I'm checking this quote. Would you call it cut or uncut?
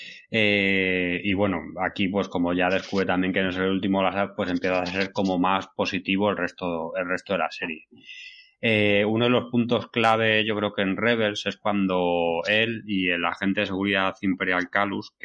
uncut